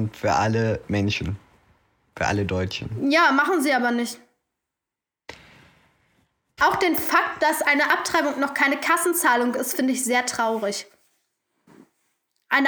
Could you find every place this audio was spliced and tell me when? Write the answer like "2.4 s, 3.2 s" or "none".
6.6 s